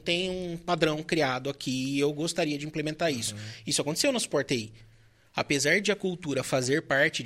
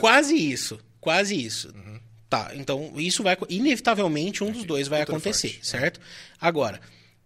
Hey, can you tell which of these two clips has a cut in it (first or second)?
second